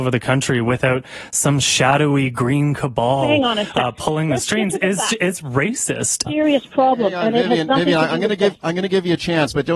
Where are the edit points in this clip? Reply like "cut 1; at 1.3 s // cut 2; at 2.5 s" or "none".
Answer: cut 1; at 6.3 s